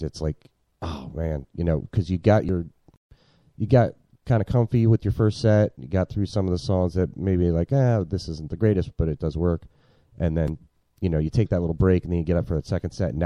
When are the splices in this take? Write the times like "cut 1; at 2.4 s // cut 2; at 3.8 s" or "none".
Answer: none